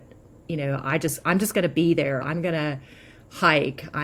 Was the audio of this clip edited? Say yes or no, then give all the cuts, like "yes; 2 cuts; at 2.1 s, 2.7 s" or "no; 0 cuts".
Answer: yes; 1 cut; at 2.2 s